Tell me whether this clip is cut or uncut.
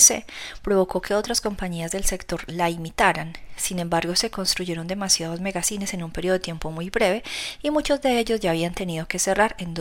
uncut